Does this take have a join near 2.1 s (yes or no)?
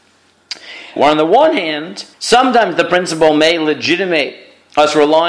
yes